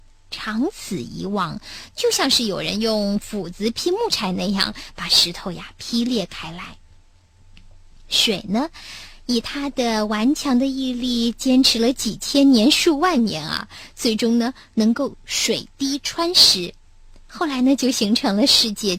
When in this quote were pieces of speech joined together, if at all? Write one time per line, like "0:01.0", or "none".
none